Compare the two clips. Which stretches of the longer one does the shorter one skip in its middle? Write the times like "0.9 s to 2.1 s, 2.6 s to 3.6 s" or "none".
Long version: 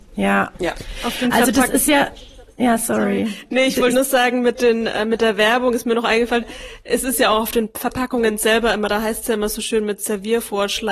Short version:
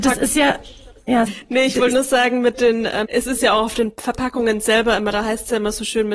2.8 s to 3.3 s, 5.1 s to 6.8 s